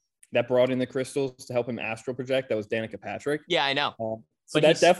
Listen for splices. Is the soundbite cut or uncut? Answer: uncut